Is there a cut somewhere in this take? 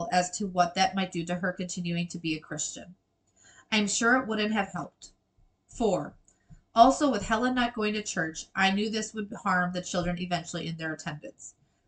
no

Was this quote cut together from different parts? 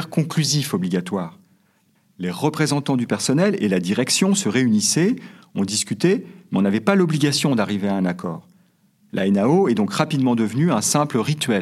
no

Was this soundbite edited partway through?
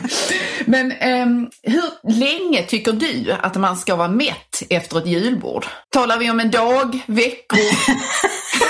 yes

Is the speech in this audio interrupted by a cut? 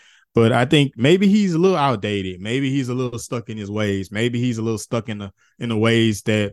no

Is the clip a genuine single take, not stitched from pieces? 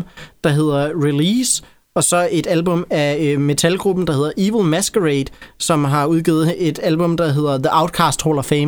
yes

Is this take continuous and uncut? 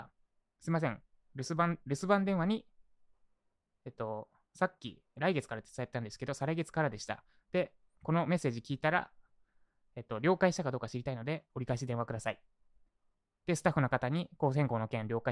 yes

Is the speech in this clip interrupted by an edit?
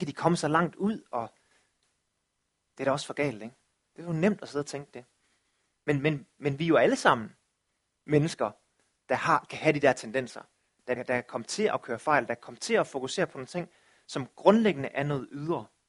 yes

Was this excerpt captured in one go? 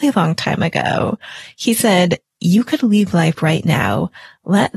yes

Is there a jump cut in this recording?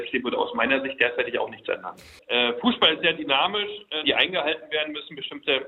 yes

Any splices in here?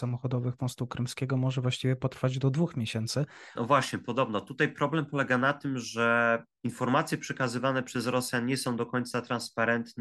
yes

